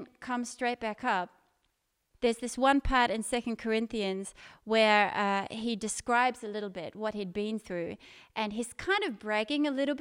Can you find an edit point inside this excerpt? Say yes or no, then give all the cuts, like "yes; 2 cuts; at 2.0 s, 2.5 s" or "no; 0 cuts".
yes; 1 cut; at 2.1 s